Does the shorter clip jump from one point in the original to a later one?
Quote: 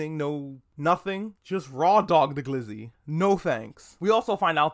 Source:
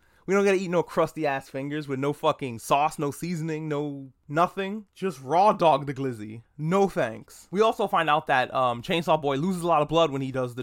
no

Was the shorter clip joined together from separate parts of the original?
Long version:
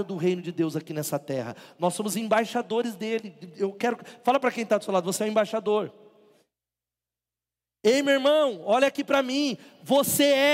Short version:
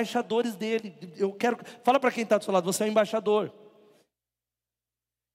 no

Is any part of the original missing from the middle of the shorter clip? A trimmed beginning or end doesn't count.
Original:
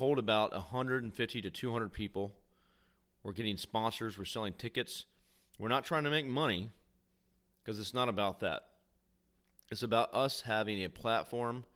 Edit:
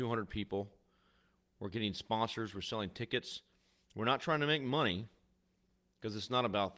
no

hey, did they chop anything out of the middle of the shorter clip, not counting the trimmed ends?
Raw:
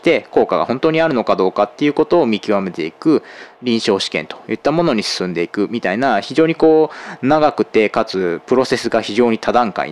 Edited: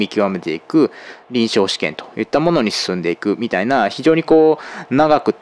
no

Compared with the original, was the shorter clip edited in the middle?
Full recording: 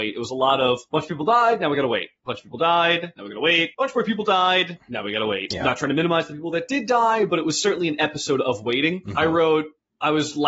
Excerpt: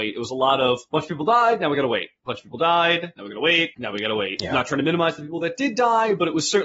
yes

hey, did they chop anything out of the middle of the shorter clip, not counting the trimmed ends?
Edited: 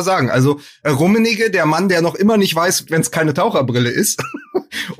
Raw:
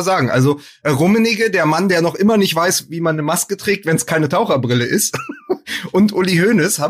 yes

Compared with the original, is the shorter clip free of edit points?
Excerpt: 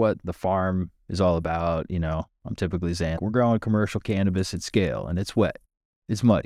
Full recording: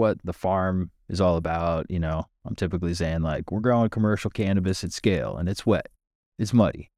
no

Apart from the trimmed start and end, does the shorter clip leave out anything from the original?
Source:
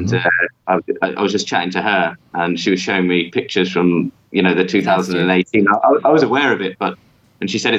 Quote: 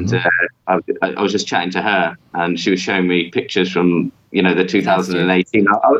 no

